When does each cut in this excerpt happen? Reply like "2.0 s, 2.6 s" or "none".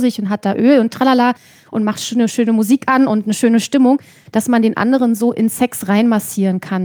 none

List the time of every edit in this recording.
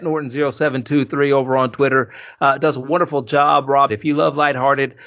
3.9 s

